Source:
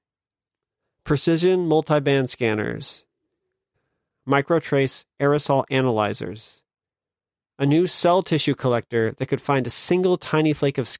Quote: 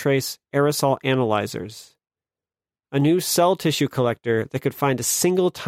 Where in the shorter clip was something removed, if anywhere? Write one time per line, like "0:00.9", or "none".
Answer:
none